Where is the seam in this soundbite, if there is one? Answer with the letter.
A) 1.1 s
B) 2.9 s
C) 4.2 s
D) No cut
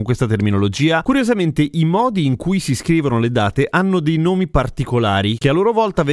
A